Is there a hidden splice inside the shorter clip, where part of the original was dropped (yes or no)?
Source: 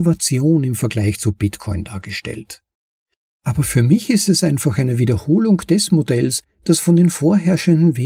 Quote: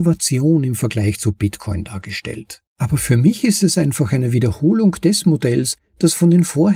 yes